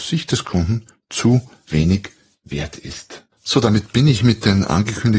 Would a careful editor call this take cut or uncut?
cut